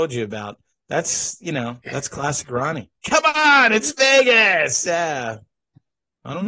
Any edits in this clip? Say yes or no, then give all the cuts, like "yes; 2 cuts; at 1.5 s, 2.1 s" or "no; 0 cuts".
yes; 1 cut; at 3.0 s